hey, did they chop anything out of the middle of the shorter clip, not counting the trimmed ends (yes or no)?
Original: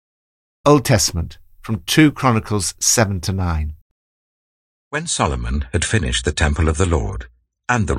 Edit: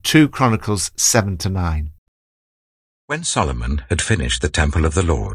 no